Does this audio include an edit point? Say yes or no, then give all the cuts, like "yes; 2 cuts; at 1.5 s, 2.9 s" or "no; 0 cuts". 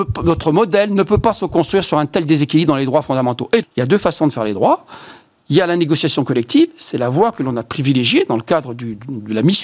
yes; 1 cut; at 3.6 s